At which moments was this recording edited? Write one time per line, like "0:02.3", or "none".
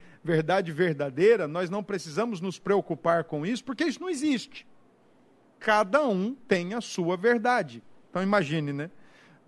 none